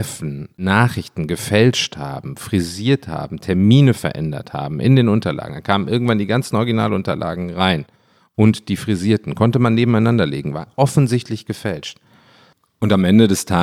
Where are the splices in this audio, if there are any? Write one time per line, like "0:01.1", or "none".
none